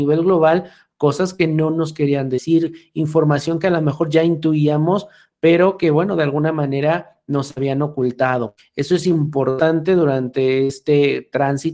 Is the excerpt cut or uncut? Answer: uncut